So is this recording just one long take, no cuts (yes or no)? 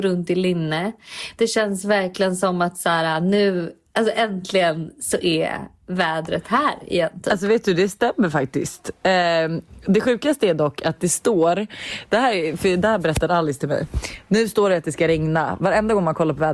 yes